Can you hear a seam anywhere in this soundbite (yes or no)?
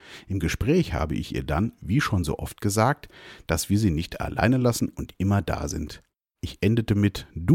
no